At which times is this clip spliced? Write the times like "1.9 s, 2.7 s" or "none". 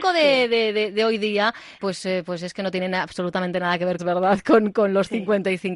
1.8 s, 4.0 s